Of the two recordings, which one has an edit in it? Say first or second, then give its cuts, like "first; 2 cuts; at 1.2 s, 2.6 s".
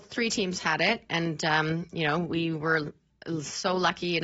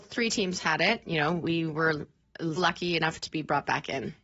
second; 2 cuts; at 1.0 s, 2.6 s